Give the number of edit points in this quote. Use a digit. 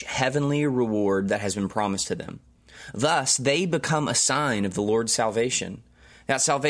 0